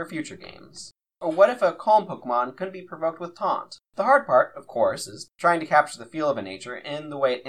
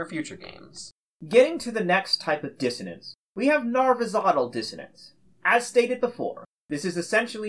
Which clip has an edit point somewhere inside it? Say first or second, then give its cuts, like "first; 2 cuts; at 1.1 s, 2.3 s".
first; 2 cuts; at 1.1 s, 3.9 s